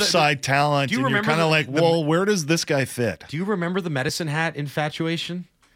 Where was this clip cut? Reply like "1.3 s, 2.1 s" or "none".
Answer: none

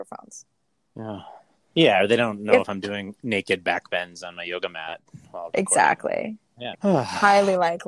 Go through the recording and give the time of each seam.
1.7 s, 6.7 s

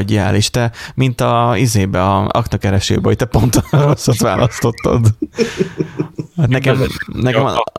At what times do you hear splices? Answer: none

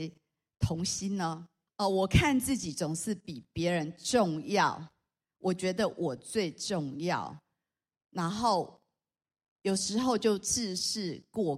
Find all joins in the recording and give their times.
1.7 s

